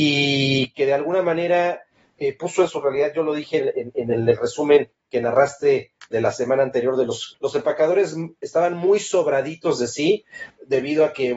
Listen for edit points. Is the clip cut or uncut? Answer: cut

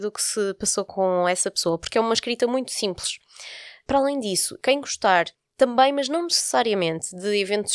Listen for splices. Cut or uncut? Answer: uncut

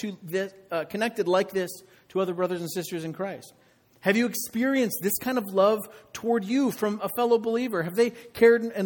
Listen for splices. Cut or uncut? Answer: uncut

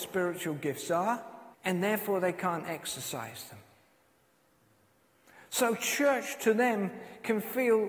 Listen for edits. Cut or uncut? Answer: cut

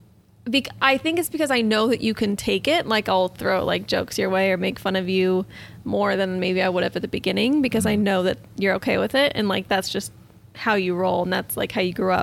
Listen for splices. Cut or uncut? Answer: uncut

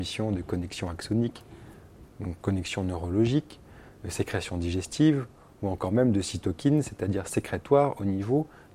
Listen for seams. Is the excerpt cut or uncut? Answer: uncut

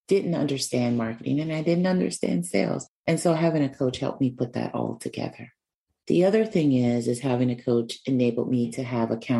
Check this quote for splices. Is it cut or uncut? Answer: uncut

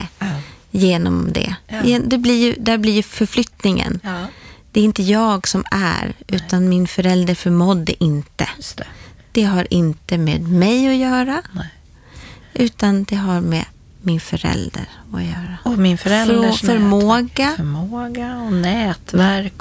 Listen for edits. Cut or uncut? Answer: uncut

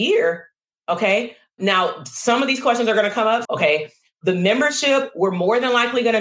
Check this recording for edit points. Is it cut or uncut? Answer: cut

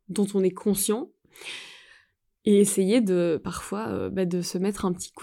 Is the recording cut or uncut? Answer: uncut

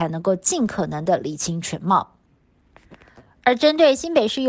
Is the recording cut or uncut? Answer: uncut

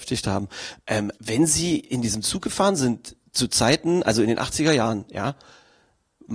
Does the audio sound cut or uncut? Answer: cut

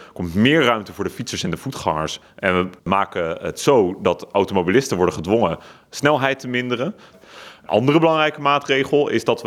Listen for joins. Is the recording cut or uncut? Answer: cut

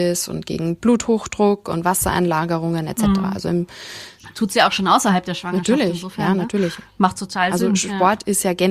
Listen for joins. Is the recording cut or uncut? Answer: uncut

